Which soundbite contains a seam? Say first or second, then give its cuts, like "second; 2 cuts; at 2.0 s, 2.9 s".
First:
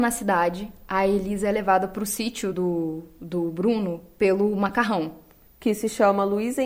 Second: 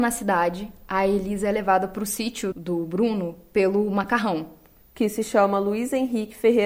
second; 1 cut; at 2.5 s